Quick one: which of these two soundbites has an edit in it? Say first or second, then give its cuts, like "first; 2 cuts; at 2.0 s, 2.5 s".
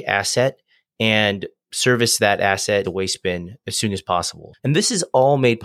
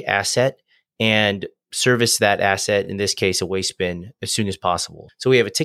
first; 2 cuts; at 2.8 s, 4.6 s